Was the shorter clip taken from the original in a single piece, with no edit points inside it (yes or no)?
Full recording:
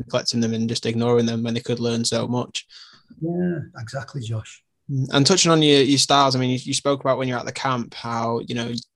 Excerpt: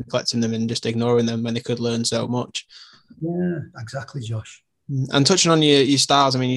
yes